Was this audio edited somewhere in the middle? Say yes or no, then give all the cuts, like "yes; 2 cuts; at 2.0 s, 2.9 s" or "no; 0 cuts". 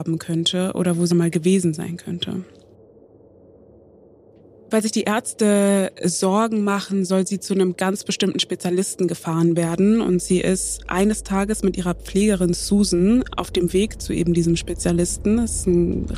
yes; 1 cut; at 1.1 s